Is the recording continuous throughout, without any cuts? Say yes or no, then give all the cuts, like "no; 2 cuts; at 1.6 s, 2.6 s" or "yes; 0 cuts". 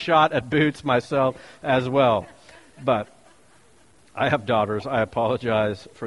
yes; 0 cuts